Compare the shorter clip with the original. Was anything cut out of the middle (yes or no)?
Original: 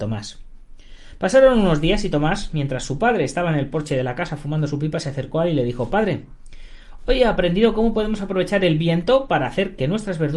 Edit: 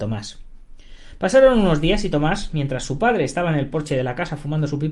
no